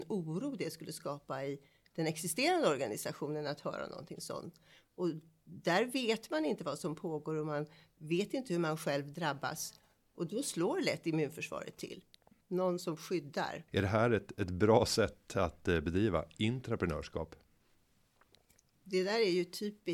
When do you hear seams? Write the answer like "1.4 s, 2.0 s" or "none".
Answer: 12.4 s, 13.7 s